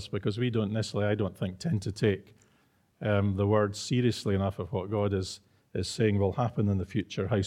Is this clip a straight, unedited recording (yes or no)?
yes